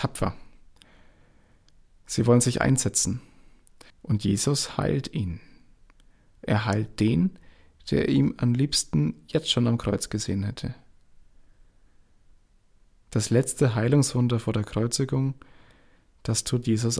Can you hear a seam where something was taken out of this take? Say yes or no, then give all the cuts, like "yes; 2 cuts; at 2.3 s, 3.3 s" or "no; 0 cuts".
yes; 1 cut; at 3.9 s